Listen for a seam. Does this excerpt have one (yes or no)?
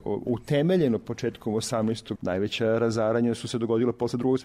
yes